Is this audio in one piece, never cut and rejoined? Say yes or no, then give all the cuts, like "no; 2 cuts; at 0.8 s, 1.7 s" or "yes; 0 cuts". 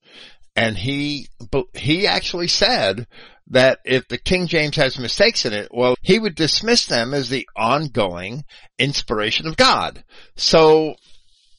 no; 1 cut; at 5.9 s